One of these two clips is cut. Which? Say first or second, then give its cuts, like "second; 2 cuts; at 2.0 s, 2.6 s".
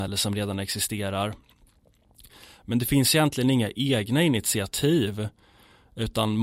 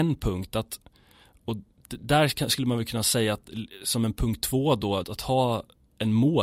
second; 1 cut; at 5.0 s